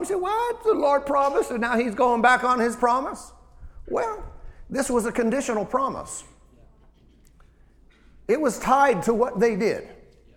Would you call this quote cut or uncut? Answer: uncut